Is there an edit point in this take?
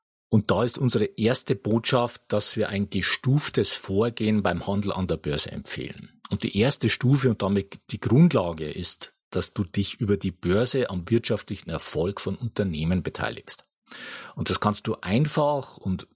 no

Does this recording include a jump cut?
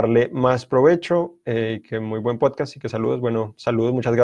no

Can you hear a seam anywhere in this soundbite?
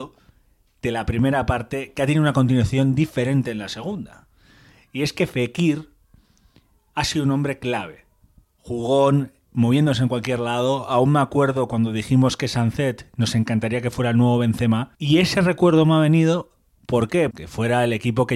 yes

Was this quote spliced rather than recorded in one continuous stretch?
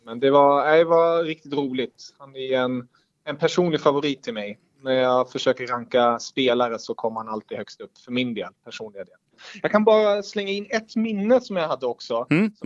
no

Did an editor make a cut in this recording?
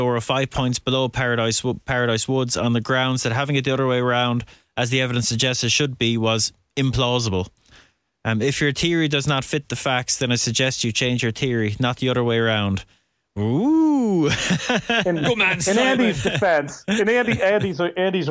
no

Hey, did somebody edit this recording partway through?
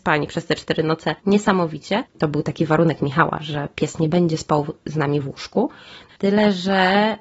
yes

